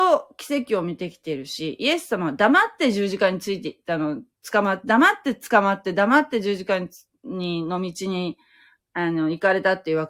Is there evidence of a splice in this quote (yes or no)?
no